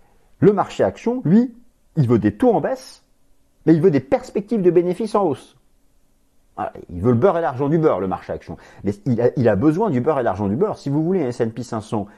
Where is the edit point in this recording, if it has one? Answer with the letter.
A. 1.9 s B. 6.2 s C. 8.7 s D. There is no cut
D